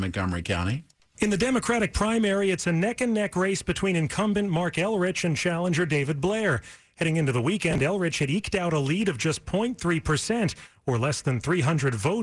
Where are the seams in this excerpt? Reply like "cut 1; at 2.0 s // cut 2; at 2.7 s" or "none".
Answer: none